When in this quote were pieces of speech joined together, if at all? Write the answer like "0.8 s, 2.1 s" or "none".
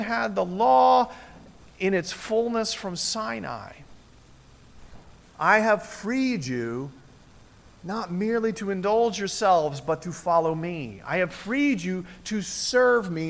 5.2 s